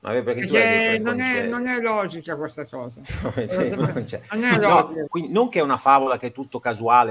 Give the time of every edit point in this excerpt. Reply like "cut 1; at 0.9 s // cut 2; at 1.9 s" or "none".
cut 1; at 5.1 s